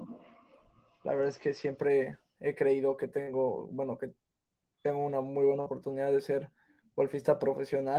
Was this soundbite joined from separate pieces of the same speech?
no; 0 cuts

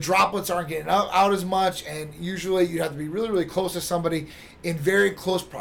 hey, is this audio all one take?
yes; 0 cuts

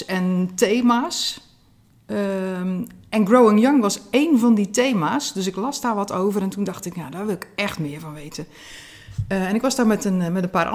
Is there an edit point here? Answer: no; 0 cuts

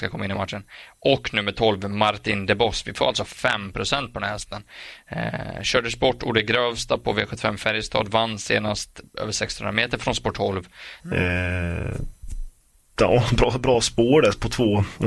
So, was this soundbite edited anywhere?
yes; 1 cut; at 11.0 s

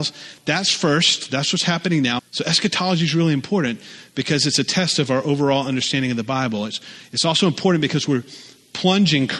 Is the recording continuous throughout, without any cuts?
no; 1 cut; at 2.2 s

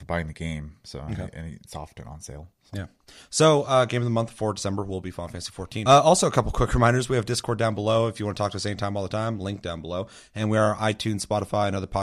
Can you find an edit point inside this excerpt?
no; 0 cuts

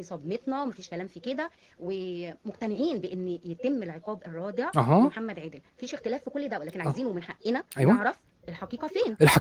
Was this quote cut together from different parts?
no; 0 cuts

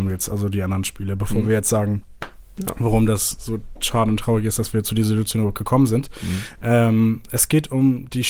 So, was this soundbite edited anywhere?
no; 0 cuts

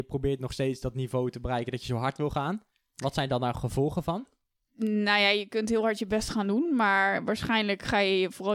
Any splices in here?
no; 0 cuts

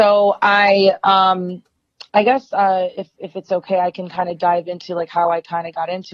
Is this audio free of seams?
yes; 0 cuts

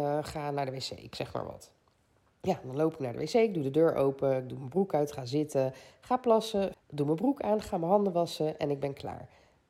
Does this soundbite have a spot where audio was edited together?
yes; 1 cut; at 6.7 s

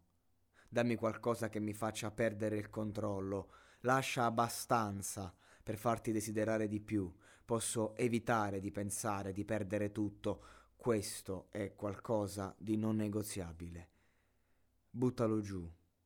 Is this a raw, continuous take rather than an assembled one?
yes; 0 cuts

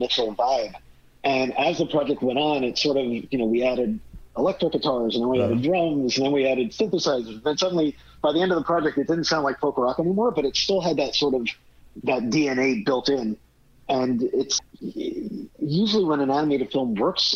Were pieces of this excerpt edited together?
yes; 1 cut; at 14.6 s

